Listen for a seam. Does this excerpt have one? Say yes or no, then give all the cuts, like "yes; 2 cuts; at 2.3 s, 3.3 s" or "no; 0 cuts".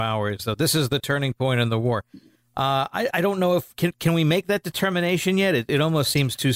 no; 0 cuts